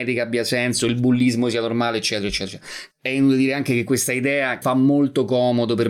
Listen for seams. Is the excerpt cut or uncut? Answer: cut